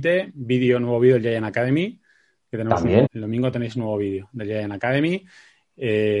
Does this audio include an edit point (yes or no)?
yes